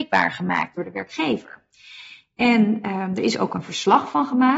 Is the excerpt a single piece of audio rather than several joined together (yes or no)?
yes